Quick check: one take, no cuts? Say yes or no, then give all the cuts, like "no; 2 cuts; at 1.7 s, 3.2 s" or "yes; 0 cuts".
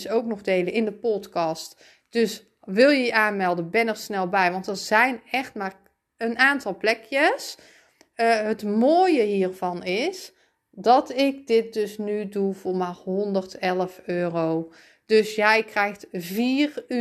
yes; 0 cuts